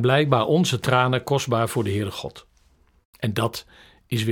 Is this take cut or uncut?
uncut